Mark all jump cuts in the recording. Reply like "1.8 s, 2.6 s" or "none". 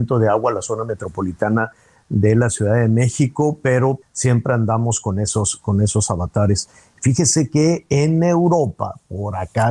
4.0 s